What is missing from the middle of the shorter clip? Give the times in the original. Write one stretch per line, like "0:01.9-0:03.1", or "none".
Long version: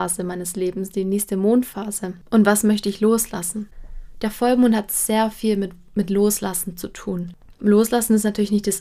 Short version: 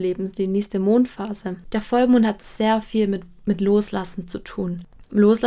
0:02.2-0:04.1

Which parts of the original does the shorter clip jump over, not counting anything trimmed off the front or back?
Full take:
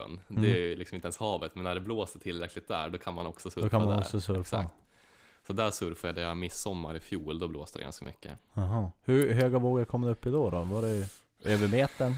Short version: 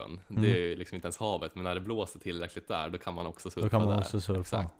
none

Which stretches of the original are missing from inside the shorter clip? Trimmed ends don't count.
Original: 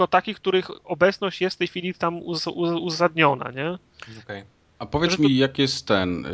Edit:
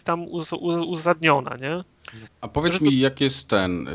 0:04.2-0:04.7

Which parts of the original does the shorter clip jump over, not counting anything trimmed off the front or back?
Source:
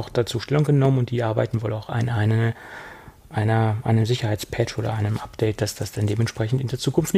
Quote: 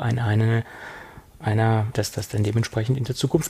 0:03.8-0:05.6

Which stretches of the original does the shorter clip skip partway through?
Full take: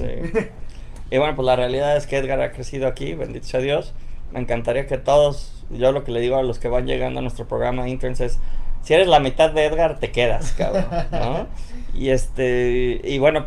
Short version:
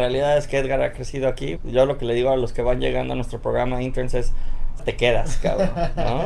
0:03.2-0:05.6
0:08.9-0:09.9

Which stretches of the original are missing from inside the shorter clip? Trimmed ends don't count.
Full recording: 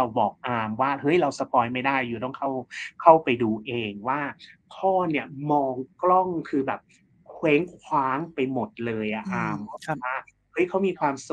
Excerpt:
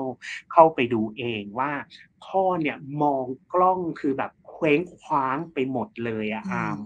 0:06.9-0:07.2

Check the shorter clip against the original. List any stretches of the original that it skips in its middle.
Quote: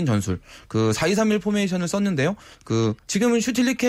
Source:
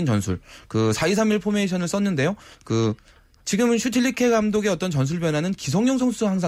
0:03.0-0:03.4

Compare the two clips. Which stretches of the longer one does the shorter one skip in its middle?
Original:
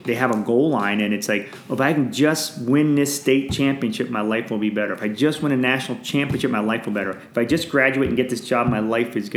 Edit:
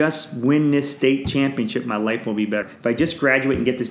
0:04.9-0:07.1

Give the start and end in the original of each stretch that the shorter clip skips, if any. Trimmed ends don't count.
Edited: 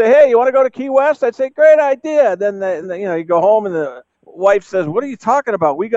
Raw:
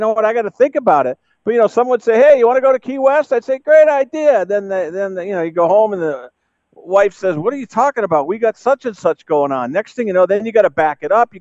0:04.9-0:05.1
0:06.4-0:06.6

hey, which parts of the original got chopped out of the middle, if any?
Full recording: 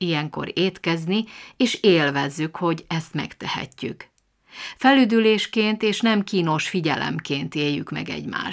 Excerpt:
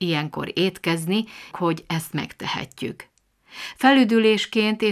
0:01.5-0:02.5

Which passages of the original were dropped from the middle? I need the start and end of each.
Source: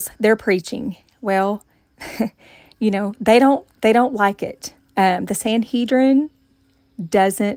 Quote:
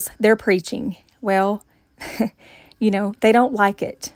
0:03.1-0:03.8

